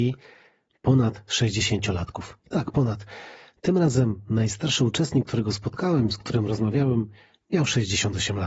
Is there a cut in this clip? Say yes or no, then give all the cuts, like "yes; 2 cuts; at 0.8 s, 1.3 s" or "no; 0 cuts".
no; 0 cuts